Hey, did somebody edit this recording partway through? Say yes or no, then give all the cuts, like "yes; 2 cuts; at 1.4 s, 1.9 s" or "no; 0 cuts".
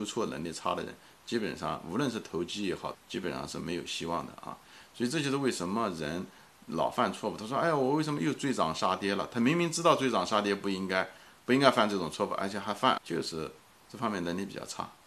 yes; 2 cuts; at 2.9 s, 13.0 s